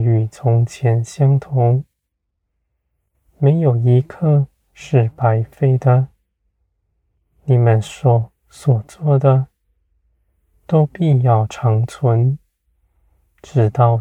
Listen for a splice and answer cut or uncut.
uncut